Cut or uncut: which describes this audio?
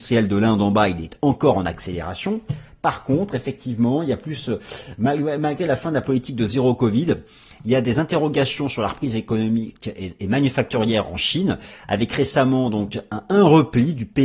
uncut